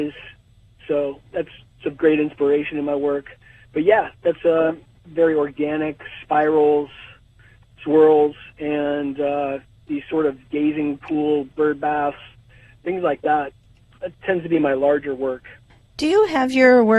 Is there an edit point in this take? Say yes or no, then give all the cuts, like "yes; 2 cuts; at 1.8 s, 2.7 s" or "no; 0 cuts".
yes; 1 cut; at 5.0 s